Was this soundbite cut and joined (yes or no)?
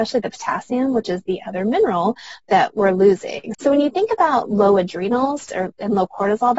yes